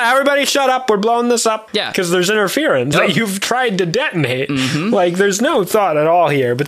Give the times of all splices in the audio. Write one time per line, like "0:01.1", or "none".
0:01.7
0:02.9